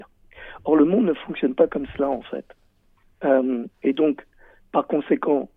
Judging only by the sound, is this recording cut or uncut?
uncut